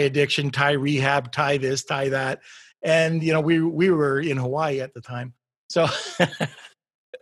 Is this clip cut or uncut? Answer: uncut